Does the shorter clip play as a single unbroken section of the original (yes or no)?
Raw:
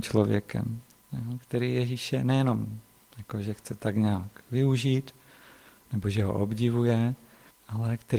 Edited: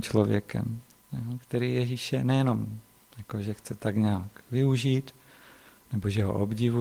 yes